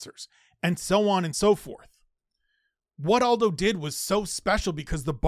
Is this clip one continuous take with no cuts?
yes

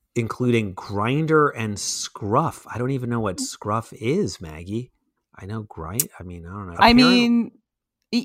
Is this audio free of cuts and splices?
no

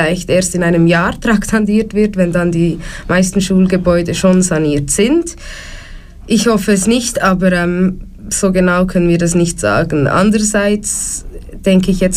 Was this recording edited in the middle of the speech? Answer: no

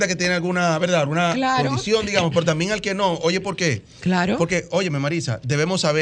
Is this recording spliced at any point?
no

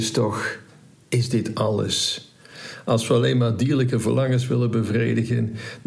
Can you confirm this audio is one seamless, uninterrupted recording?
yes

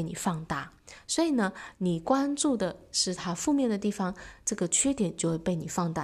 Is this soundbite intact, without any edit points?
yes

